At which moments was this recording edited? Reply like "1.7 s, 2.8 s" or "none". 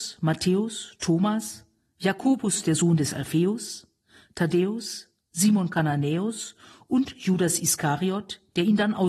none